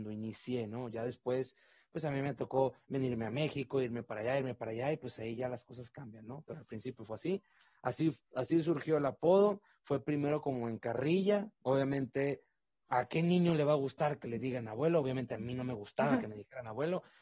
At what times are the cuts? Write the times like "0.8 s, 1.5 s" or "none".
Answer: 11.5 s